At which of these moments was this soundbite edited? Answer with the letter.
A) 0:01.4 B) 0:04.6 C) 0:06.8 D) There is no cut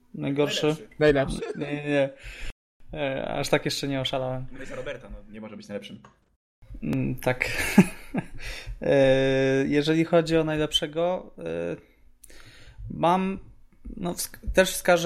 A